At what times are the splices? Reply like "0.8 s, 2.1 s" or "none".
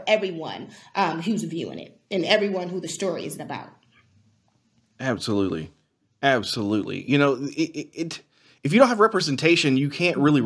none